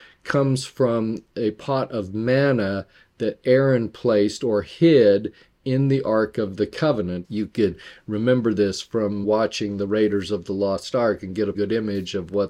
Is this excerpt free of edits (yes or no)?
no